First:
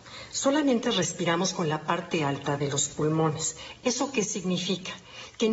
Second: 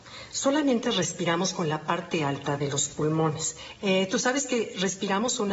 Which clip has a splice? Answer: second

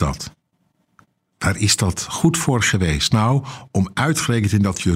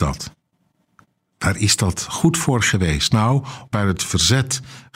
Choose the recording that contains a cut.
second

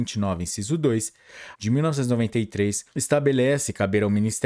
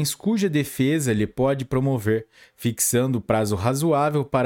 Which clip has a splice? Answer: first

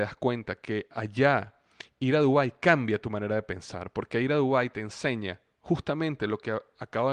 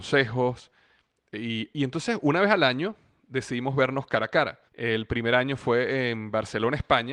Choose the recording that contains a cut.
second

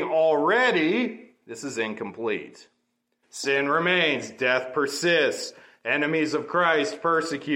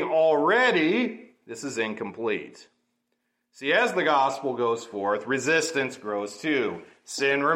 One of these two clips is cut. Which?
first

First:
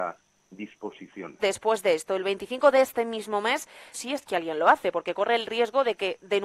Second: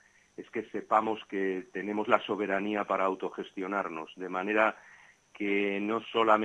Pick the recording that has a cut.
first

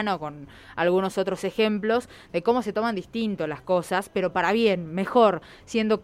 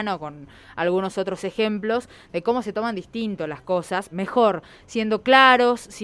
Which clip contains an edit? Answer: second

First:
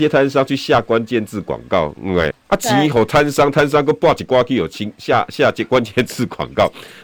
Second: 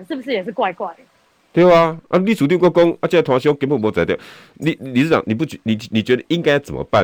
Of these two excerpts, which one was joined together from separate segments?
first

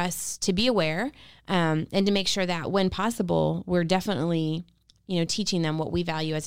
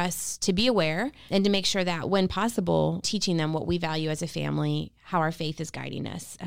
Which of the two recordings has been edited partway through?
second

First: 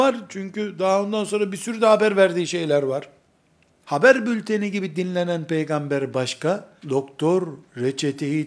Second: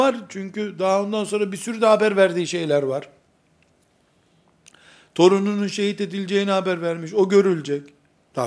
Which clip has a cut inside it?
first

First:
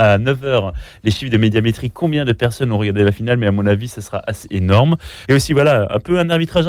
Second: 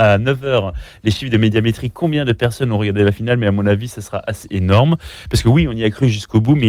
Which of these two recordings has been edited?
first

